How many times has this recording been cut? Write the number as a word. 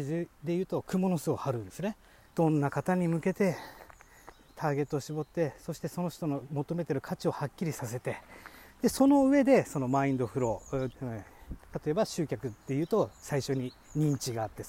two